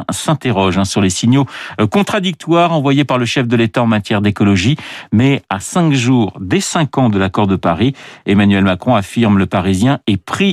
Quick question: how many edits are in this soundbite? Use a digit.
0